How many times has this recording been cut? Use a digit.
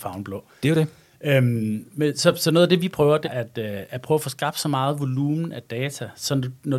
1